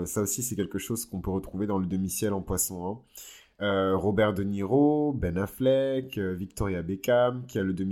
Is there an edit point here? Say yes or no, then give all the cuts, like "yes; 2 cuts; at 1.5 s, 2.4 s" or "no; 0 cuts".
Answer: no; 0 cuts